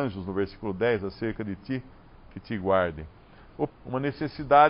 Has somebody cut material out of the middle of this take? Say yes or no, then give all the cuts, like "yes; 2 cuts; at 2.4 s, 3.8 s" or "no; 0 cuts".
yes; 1 cut; at 3.7 s